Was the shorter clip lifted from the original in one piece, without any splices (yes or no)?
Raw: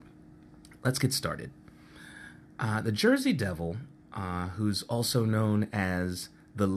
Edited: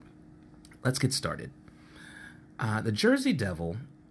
yes